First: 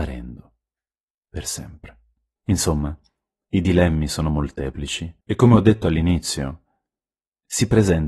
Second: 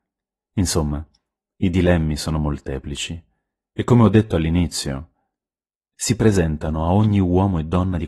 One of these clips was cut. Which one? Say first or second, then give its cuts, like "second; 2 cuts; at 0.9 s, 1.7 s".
first; 2 cuts; at 2.4 s, 5.2 s